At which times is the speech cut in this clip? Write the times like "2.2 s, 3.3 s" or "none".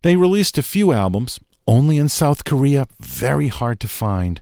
none